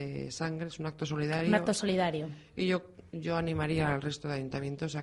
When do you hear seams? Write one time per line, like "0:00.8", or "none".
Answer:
none